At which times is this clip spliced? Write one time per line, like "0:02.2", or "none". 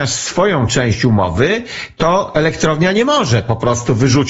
none